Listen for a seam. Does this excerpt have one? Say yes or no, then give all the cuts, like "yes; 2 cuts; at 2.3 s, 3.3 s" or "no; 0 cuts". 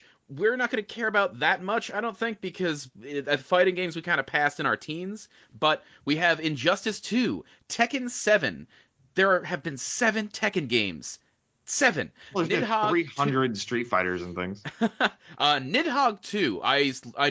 no; 0 cuts